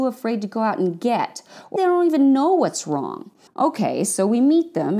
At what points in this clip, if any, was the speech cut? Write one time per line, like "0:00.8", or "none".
0:01.8
0:03.5